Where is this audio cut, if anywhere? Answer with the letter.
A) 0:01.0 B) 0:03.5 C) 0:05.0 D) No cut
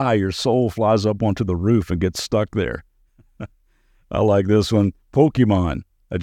D